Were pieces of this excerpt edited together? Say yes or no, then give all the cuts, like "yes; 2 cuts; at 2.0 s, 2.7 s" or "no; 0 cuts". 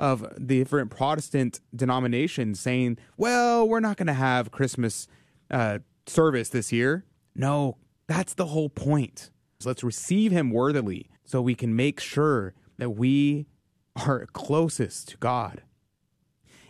yes; 2 cuts; at 9.6 s, 11.2 s